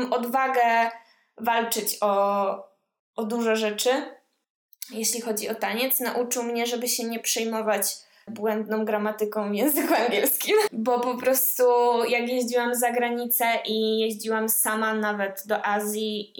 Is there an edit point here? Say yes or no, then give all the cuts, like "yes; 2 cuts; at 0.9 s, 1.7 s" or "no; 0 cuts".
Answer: yes; 2 cuts; at 8.3 s, 10.7 s